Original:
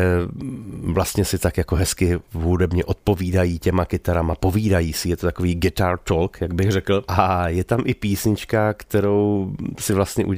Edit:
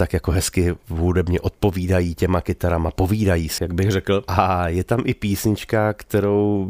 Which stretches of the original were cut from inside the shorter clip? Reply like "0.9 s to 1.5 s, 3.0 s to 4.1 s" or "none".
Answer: 5.0 s to 6.4 s